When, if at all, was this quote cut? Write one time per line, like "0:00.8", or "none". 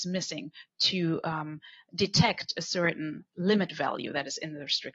none